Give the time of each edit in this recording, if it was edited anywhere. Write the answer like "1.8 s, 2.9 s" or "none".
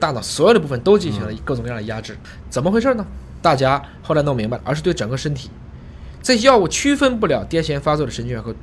2.4 s, 4.6 s